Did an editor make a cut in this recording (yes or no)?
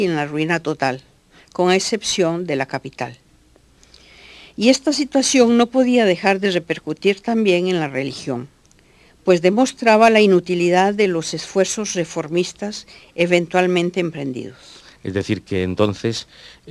no